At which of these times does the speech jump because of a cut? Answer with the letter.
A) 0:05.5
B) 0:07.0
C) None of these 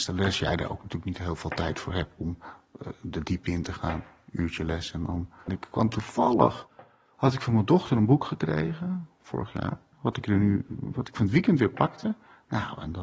A